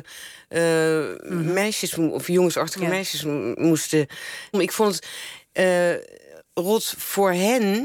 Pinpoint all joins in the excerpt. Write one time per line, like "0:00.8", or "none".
0:04.5